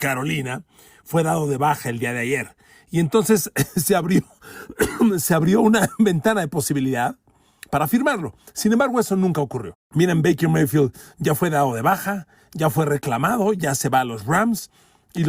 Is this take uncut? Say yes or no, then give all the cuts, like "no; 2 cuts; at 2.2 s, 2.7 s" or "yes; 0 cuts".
yes; 0 cuts